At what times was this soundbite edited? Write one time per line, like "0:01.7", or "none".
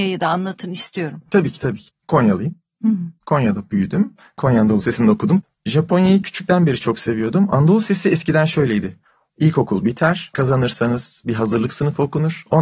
0:10.3

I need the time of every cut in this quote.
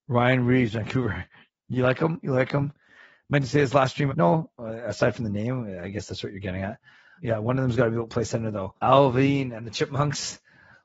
0:04.1
0:07.2
0:08.8

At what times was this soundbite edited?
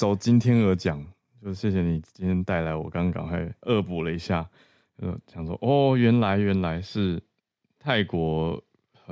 none

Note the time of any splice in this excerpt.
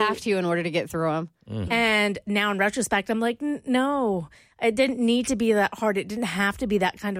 0:01.7

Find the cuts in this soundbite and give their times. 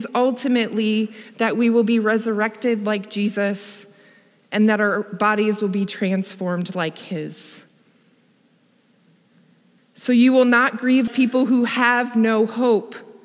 0:09.8
0:11.1

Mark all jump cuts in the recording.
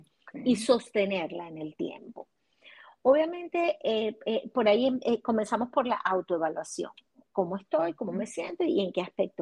none

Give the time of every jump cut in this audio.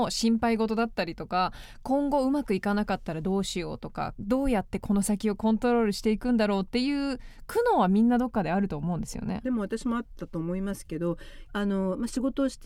0:09.4
0:11.4

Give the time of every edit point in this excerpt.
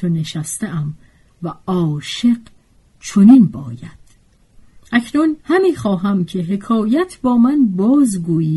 0:05.4

